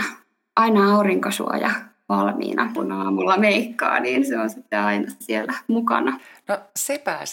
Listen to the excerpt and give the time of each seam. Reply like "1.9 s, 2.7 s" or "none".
2.8 s